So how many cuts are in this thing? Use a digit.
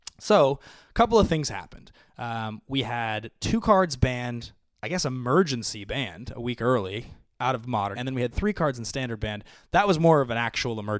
1